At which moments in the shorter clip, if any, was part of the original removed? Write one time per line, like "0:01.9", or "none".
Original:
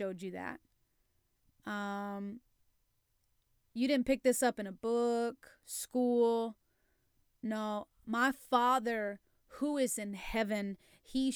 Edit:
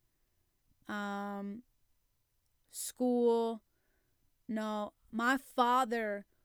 0:02.7